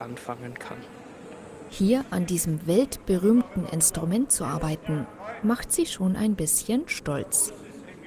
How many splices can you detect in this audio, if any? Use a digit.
1